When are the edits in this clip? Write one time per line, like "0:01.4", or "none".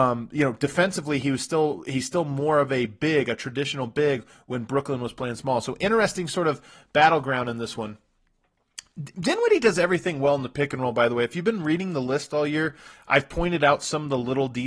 none